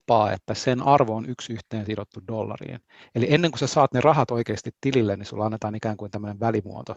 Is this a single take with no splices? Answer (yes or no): yes